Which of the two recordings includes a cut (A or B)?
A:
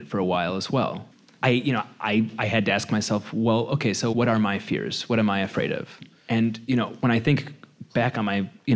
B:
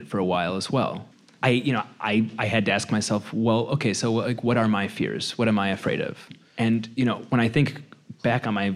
A